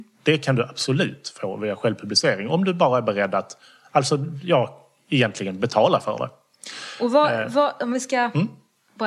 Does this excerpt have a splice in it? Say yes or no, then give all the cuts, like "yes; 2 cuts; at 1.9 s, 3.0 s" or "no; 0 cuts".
no; 0 cuts